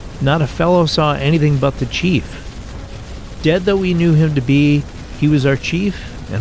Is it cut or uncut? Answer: uncut